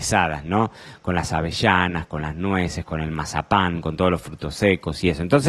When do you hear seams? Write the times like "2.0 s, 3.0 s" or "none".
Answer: none

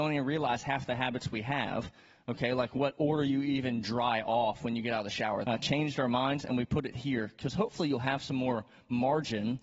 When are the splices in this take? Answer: 5.4 s

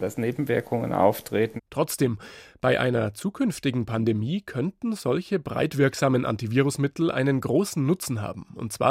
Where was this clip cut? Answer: 1.6 s

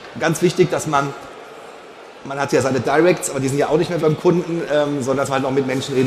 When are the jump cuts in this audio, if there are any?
4.0 s

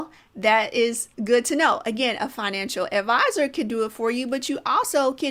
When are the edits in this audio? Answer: 1.1 s

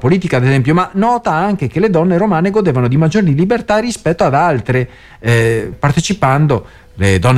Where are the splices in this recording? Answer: 5.7 s

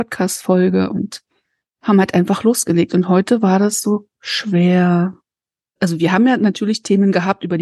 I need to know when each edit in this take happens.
5.8 s

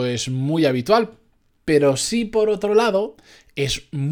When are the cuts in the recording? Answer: none

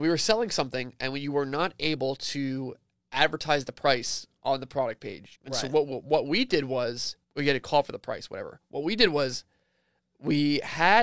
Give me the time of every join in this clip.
5.3 s, 7.2 s

